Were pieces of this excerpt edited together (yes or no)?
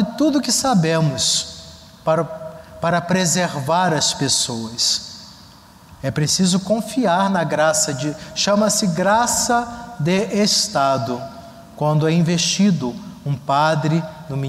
no